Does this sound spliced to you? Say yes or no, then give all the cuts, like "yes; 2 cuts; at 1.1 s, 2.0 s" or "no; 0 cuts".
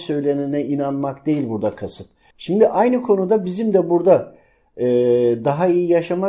yes; 1 cut; at 2.3 s